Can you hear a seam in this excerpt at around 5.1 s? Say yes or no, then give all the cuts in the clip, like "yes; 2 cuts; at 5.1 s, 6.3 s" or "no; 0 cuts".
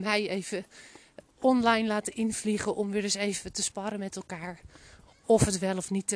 no; 1 cut; at 1.2 s